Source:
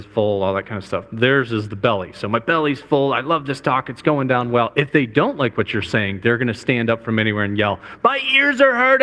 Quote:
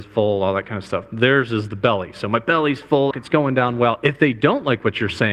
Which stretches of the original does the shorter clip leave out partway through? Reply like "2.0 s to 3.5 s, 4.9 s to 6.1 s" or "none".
3.1 s to 3.8 s